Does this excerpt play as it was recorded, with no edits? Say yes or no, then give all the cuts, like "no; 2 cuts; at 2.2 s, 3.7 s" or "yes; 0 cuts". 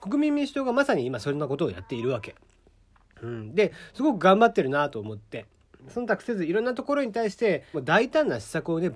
no; 2 cuts; at 5.8 s, 7.7 s